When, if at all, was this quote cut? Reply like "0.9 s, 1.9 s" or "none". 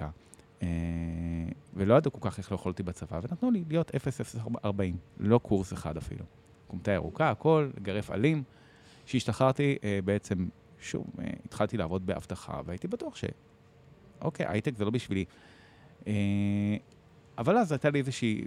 1.7 s

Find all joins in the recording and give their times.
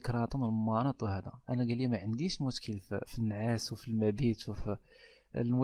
3.1 s

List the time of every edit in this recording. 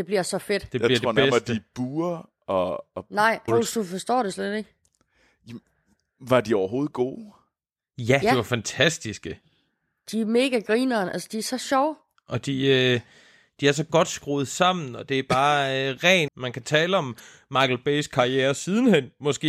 3.5 s, 12.1 s, 16.3 s

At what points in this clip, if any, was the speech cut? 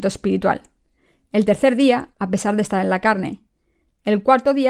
2.1 s

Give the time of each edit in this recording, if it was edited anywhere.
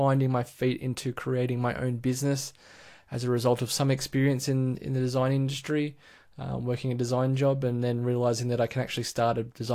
none

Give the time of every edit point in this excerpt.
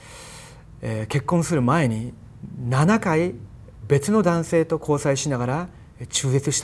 3.8 s

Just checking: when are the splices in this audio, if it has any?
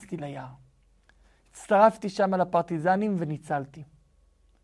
none

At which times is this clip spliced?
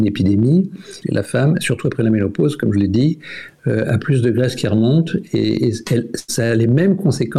1.0 s

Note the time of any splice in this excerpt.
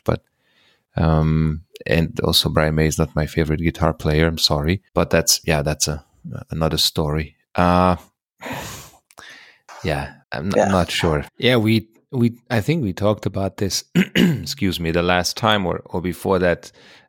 4.9 s, 10.2 s, 11.3 s

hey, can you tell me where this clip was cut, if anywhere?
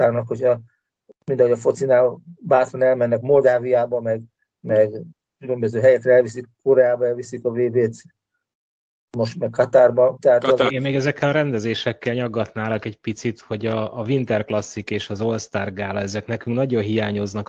10.7 s

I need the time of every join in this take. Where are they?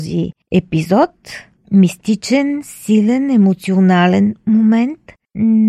none

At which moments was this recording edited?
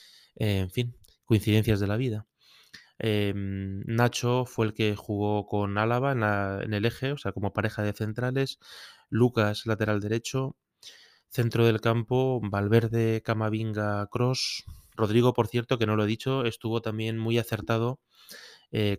14.9 s

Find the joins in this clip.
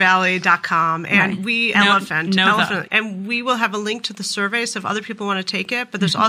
1.7 s, 2.9 s

